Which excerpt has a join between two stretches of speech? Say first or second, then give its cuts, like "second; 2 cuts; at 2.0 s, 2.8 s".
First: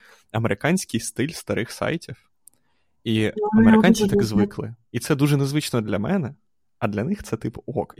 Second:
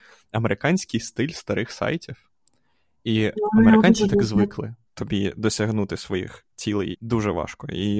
second; 2 cuts; at 4.9 s, 6.9 s